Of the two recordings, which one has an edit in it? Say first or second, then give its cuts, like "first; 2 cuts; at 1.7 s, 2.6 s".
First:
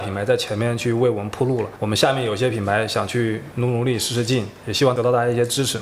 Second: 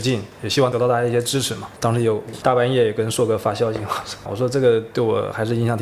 second; 2 cuts; at 1.8 s, 4.3 s